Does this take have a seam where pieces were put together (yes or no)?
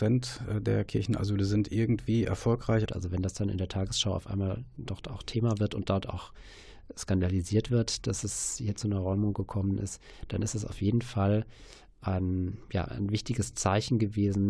yes